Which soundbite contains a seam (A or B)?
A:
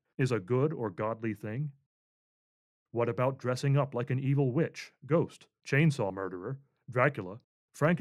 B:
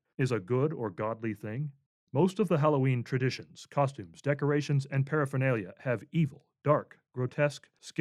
B